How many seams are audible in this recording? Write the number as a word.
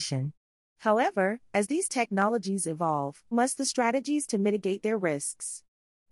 one